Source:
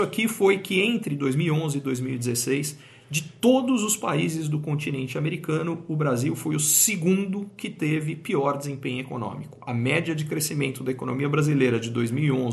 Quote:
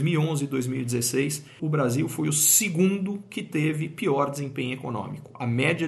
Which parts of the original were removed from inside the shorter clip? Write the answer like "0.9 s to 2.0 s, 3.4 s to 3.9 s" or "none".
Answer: 2.9 s to 5.9 s